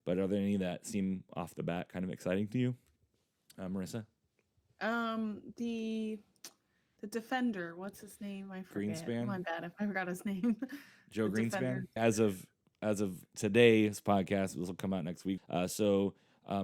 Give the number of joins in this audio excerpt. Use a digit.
2